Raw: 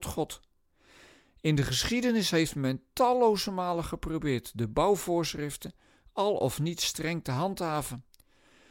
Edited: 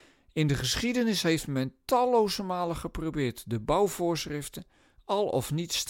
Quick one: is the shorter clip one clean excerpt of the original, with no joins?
yes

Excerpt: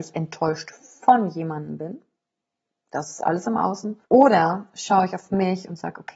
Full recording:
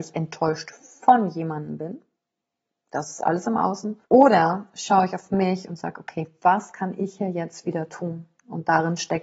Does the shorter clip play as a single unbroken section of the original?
yes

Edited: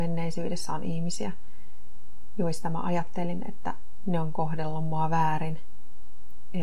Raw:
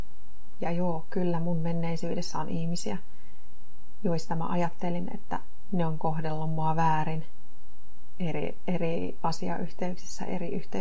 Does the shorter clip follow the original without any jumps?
yes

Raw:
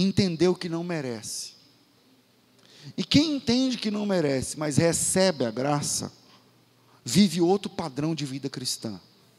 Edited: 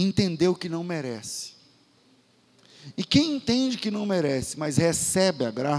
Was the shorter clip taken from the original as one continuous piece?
yes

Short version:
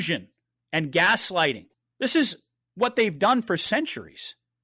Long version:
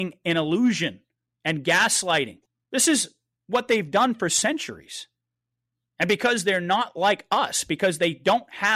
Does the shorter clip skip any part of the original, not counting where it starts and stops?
no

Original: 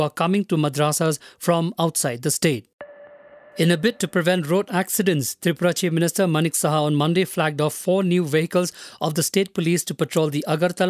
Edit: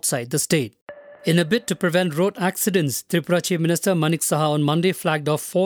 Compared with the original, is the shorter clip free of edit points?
no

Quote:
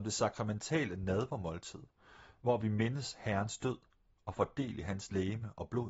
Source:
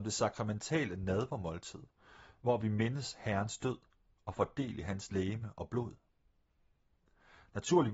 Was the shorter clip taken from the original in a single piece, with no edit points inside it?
yes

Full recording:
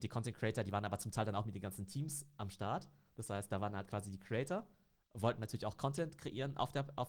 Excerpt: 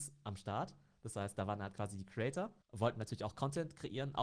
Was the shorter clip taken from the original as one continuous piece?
no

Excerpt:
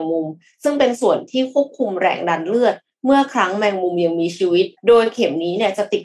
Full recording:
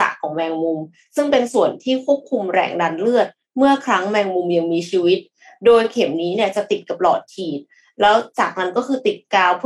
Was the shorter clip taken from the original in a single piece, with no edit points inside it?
no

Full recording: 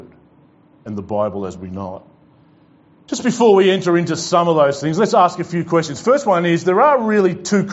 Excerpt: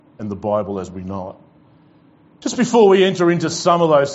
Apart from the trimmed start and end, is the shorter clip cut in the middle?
no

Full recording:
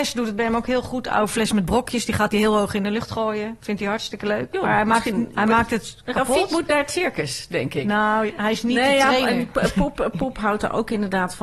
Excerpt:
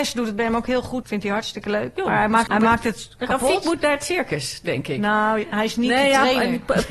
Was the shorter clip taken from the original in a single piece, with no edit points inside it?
no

